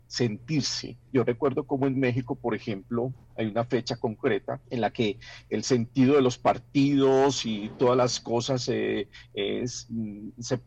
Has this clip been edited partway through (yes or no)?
yes